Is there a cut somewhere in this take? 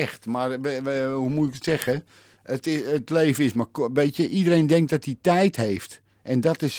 no; 0 cuts

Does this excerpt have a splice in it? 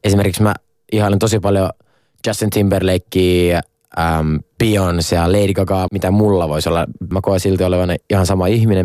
yes; 2 cuts; at 5.9 s, 7.1 s

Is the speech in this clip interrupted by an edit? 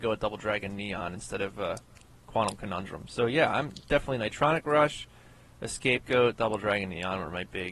no; 0 cuts

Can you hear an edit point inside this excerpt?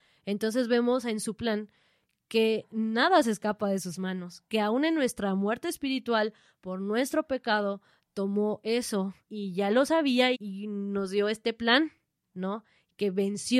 yes; 3 cuts; at 9.3 s, 10.3 s, 12.3 s

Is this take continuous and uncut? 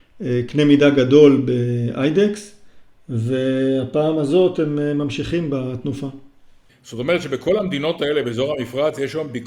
no; 1 cut; at 6.7 s

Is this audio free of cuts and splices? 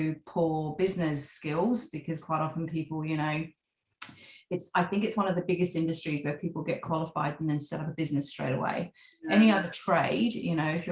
yes; 0 cuts

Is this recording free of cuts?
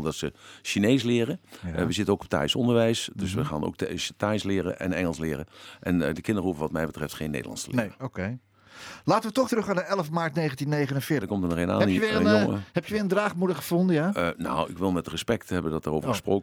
no; 2 cuts; at 9.5 s, 11.2 s

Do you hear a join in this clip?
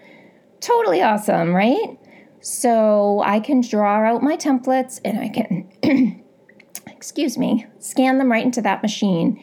no; 0 cuts

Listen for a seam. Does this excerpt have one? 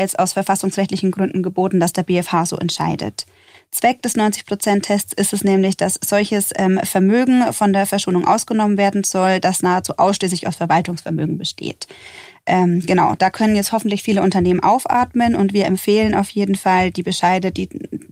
no; 0 cuts

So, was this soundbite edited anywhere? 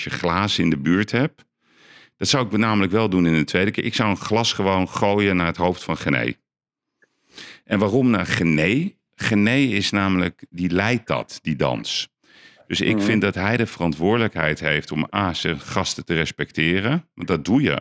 no; 0 cuts

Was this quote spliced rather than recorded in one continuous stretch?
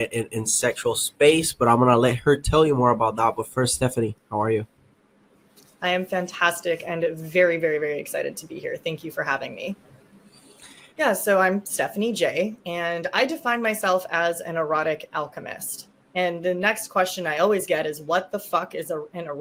yes; 1 cut; at 10.9 s

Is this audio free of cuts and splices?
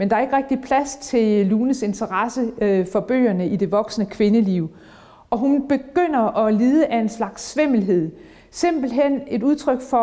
yes; 0 cuts

